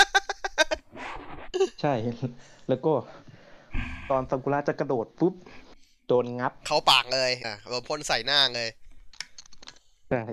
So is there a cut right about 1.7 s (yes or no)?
no